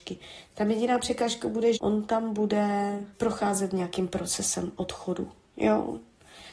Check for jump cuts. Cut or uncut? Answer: cut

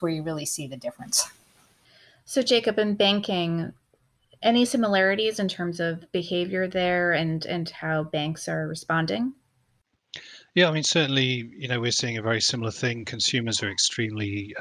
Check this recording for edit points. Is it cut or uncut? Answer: uncut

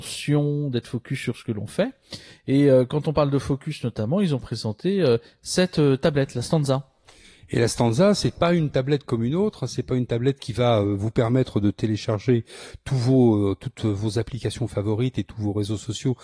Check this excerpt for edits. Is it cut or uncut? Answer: uncut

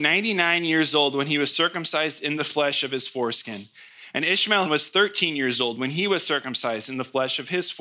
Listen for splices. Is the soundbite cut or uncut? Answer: cut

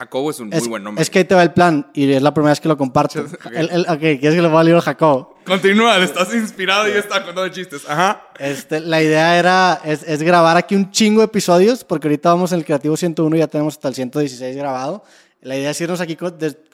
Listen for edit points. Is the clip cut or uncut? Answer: uncut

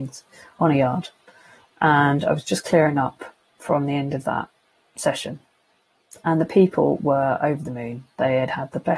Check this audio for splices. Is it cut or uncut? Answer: uncut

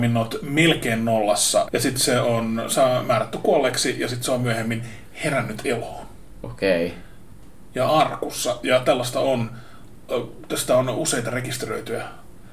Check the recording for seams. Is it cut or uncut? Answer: cut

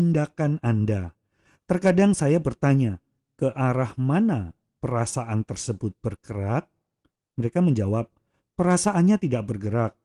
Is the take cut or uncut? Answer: uncut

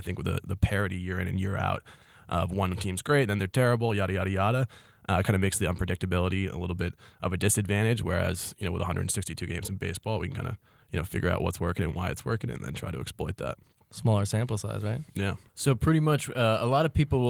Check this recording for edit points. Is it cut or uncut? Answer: uncut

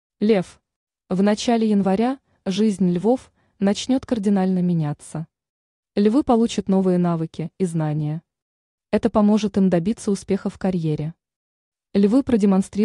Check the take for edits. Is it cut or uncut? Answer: cut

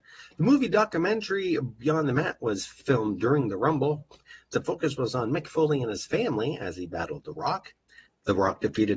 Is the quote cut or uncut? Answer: cut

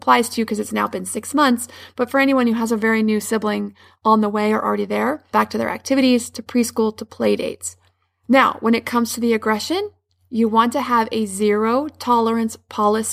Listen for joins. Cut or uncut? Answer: cut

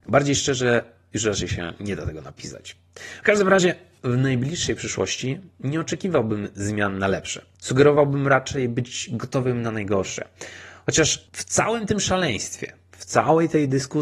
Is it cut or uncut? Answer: uncut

